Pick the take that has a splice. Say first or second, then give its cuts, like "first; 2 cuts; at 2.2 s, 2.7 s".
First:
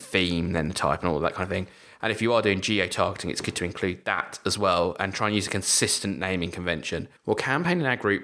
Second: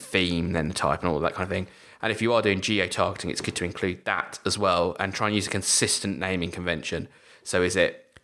first; 1 cut; at 7.2 s